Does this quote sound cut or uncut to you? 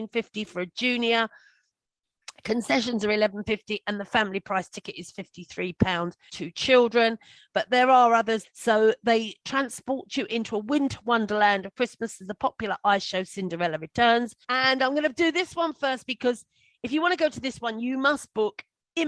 cut